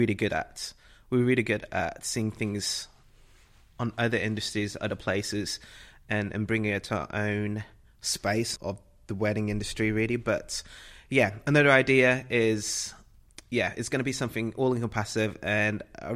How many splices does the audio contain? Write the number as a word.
one